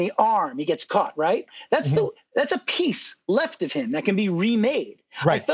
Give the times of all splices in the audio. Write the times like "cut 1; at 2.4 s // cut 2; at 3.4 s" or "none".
none